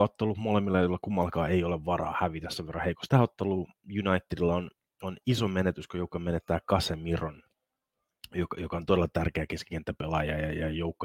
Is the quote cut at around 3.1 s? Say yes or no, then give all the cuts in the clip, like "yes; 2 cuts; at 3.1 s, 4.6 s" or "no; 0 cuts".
yes; 1 cut; at 3.1 s